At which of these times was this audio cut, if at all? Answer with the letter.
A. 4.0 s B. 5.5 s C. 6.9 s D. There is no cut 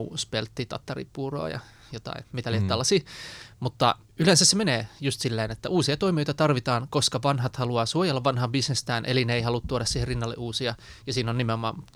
A